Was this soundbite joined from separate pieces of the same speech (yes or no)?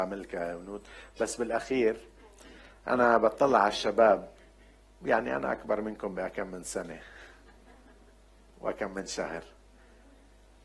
no